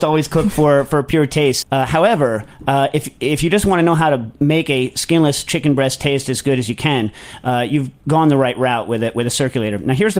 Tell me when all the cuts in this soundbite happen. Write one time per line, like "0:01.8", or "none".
0:01.6

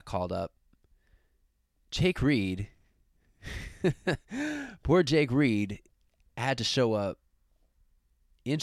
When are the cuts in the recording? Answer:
none

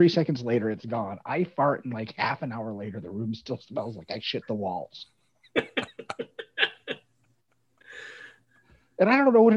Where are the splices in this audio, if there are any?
none

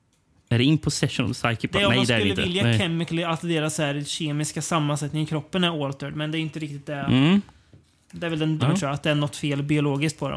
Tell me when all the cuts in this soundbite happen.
0:08.6

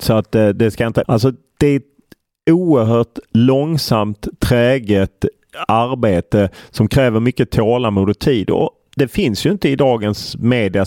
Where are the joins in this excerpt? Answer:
0:01.0

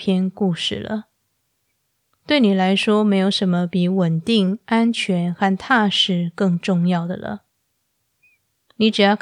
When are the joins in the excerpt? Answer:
none

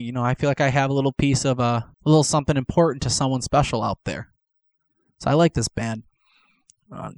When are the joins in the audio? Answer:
0:01.9

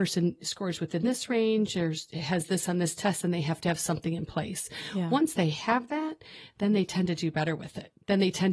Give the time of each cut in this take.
none

